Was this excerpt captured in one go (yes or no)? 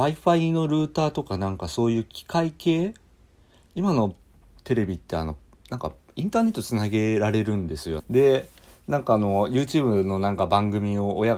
no